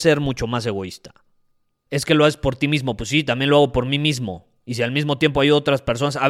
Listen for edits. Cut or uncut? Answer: cut